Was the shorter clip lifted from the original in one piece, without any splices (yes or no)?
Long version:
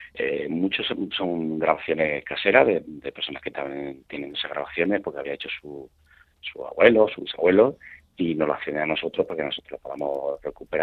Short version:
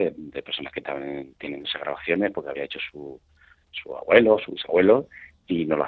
yes